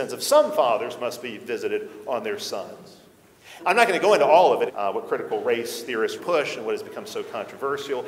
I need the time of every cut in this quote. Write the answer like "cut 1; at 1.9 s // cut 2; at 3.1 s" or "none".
cut 1; at 3.6 s // cut 2; at 4.7 s // cut 3; at 6.2 s